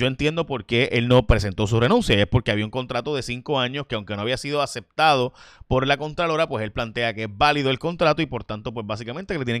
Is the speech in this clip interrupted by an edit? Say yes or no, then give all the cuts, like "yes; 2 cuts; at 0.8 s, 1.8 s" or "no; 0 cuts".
no; 0 cuts